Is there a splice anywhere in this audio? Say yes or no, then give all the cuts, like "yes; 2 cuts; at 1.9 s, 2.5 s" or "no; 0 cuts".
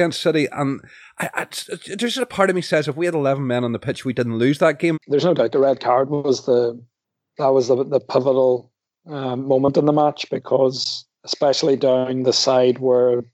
yes; 1 cut; at 4.9 s